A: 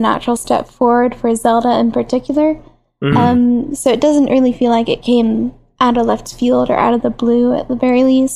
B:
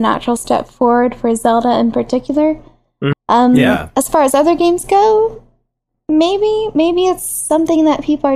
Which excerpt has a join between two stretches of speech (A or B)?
B